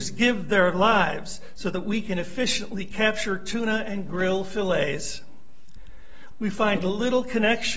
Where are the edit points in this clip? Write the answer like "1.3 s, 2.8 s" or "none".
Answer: 6.3 s